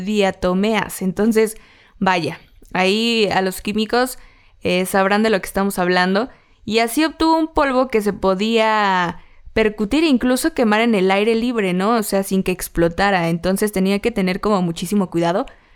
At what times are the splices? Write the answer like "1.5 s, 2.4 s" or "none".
none